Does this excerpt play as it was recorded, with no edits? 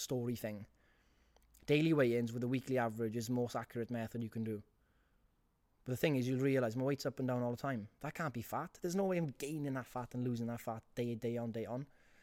yes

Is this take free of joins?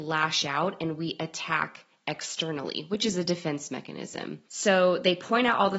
no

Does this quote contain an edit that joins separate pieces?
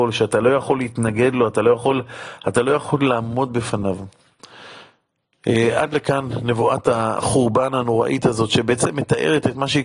no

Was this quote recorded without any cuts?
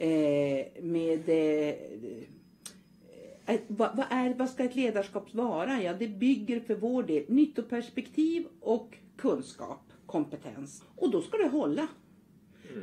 no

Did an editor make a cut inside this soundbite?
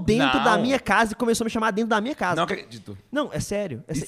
no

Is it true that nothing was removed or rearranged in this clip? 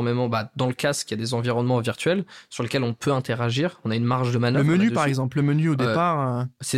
yes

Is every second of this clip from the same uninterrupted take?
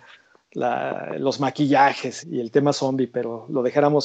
no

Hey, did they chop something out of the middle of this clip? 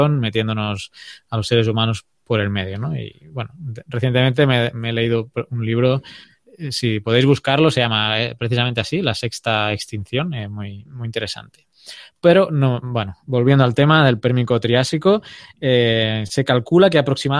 no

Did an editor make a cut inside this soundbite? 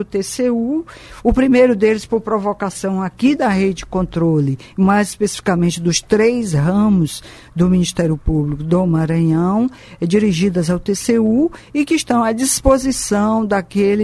no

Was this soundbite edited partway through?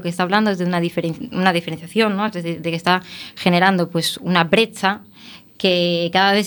no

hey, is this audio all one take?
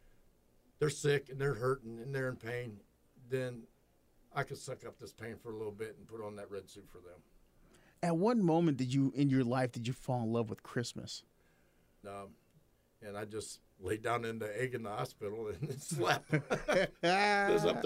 no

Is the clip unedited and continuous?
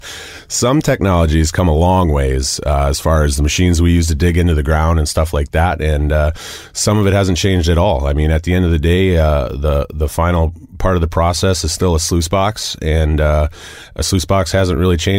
yes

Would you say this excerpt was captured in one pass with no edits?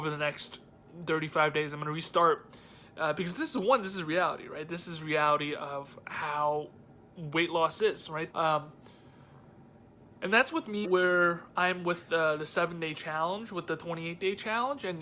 no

